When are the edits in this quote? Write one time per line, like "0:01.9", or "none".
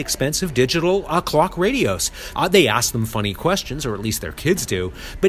0:02.3